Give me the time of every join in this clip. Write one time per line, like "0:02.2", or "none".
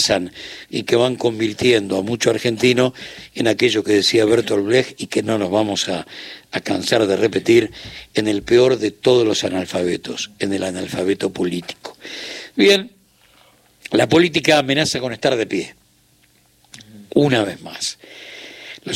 none